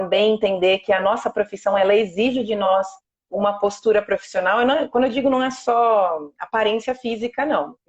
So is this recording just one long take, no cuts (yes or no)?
yes